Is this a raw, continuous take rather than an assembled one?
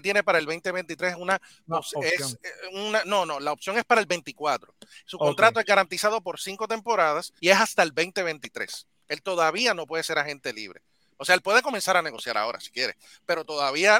no; 1 cut; at 7.4 s

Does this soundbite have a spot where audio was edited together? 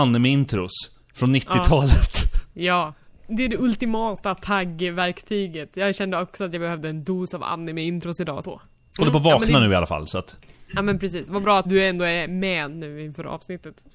yes; 2 cuts; at 8.4 s, 11.6 s

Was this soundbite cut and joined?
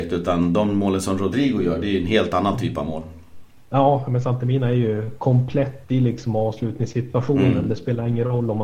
no; 0 cuts

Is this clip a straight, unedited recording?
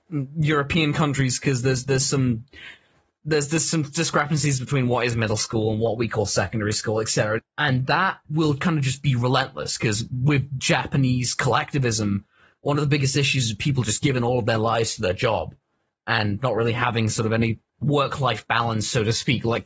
no; 2 cuts; at 7.4 s, 17.7 s

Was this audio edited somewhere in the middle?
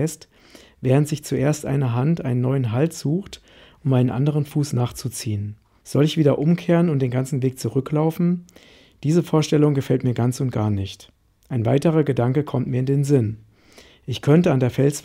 yes; 1 cut; at 5.8 s

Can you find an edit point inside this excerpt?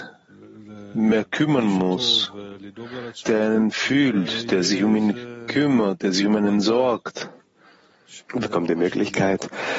yes; 2 cuts; at 3.2 s, 8.2 s

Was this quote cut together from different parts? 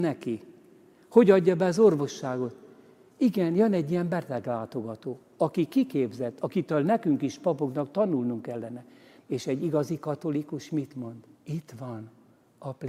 yes; 2 cuts; at 9.2 s, 11.3 s

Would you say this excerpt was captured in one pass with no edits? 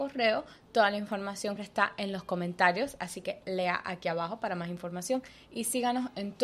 no; 1 cut; at 1.6 s

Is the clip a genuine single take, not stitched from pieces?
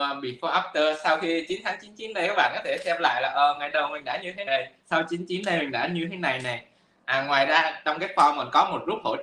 no; 1 cut; at 4.5 s

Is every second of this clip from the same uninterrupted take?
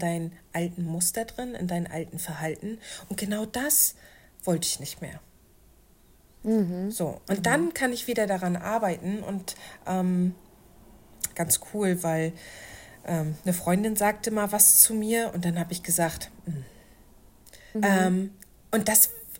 no; 2 cuts; at 11.3 s, 17.7 s

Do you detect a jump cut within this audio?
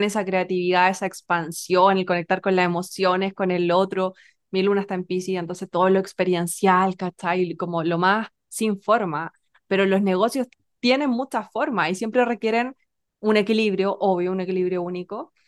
no; 0 cuts

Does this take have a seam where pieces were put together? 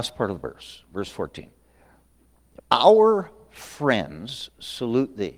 yes; 1 cut; at 2.6 s

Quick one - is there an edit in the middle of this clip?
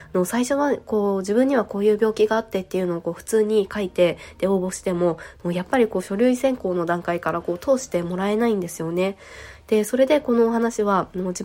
no; 0 cuts

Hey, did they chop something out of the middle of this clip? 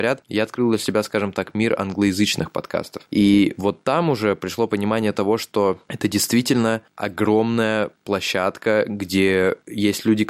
no; 0 cuts

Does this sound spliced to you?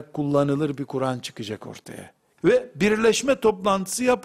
yes; 1 cut; at 2.4 s

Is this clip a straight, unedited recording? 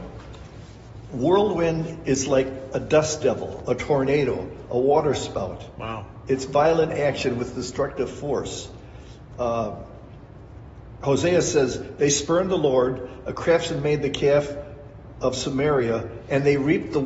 yes; 0 cuts

